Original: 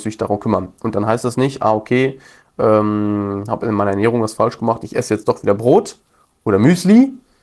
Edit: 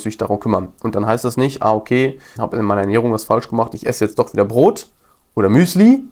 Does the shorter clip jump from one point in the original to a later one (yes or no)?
yes